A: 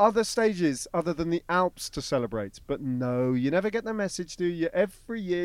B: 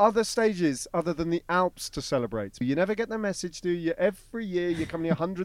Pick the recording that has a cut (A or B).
B